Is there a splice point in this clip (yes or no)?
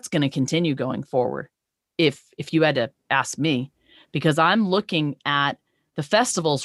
no